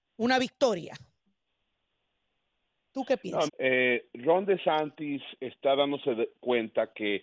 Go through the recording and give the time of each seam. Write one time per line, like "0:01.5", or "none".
0:03.5